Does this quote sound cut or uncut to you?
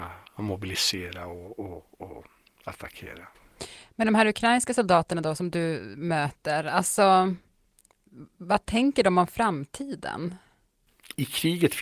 uncut